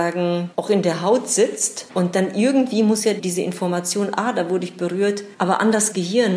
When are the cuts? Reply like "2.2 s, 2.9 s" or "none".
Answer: none